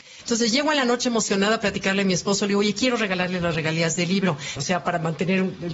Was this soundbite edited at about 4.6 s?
yes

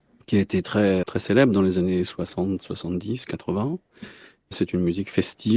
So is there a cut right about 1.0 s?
yes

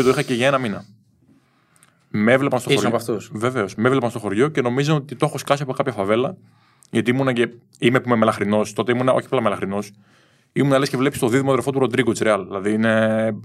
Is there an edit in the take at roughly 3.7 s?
no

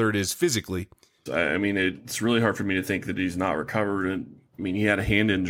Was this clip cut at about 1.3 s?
yes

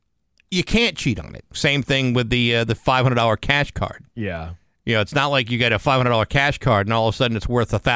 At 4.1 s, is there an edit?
no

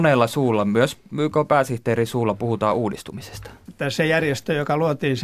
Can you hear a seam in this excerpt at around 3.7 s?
yes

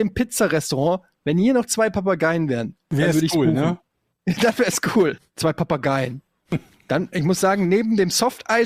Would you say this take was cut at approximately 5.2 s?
yes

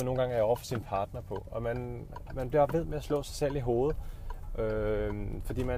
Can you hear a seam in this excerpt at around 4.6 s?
no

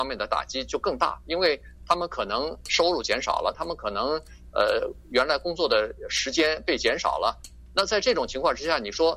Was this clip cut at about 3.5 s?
yes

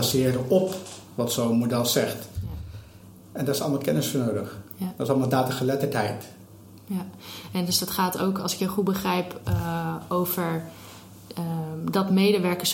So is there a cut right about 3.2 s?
no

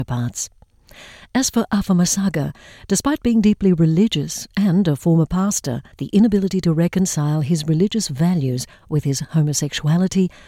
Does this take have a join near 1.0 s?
no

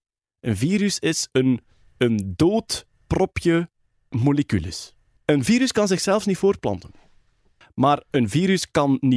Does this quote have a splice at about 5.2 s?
yes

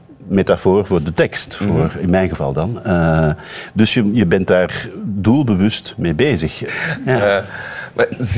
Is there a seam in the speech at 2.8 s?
no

